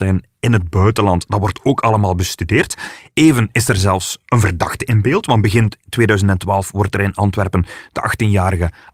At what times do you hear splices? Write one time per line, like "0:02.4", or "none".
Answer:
none